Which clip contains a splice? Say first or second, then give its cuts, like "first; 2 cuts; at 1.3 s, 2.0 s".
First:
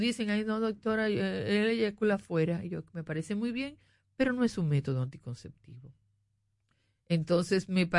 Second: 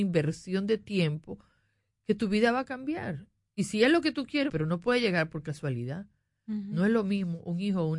second; 1 cut; at 4.5 s